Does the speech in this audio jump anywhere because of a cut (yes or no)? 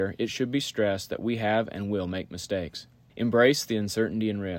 yes